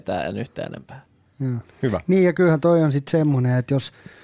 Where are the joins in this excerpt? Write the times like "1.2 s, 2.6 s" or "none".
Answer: 1.6 s

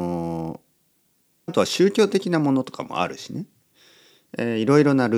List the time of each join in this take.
1.5 s

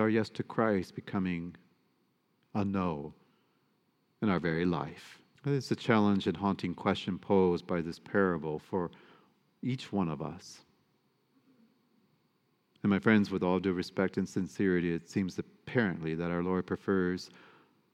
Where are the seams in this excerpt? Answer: 5.4 s

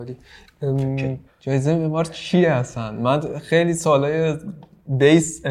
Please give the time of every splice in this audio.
1.3 s

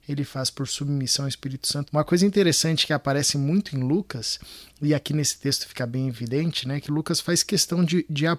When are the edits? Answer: 1.8 s

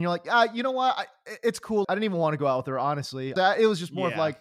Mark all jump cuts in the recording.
1.8 s, 3.4 s

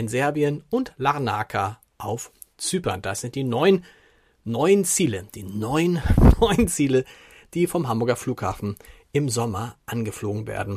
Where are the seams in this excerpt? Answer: none

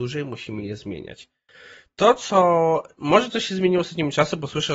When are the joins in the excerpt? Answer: none

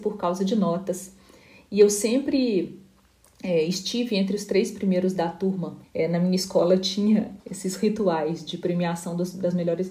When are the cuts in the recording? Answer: 5.8 s, 7.4 s

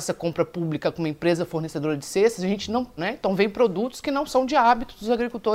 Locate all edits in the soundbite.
3.0 s

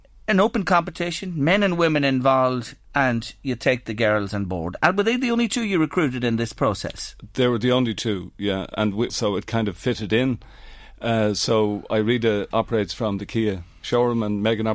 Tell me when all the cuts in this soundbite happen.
9.1 s, 12.5 s

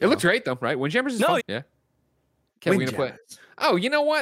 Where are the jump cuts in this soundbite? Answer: 1.4 s

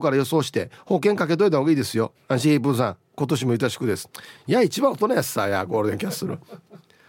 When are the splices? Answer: 2.1 s

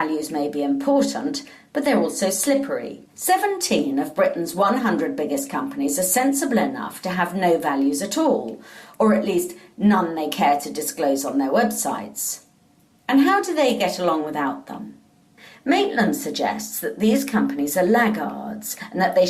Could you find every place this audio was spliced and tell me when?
3.1 s

